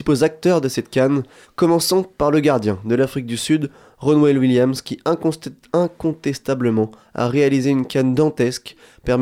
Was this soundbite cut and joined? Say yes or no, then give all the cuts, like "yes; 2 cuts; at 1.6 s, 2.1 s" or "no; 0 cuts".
yes; 1 cut; at 1.4 s